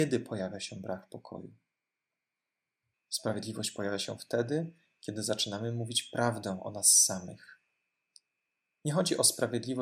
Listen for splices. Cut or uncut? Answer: cut